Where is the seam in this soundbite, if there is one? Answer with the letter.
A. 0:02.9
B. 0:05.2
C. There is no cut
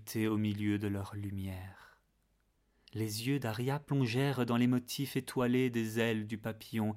A